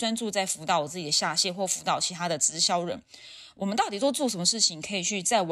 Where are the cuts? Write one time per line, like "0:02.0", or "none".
none